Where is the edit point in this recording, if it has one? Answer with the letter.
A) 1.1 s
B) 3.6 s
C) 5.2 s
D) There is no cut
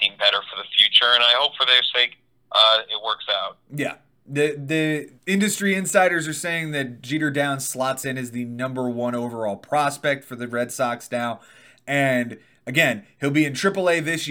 C